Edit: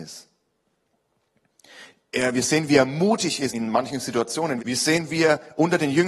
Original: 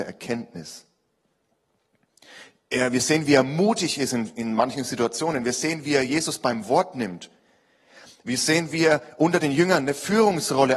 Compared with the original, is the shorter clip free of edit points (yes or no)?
no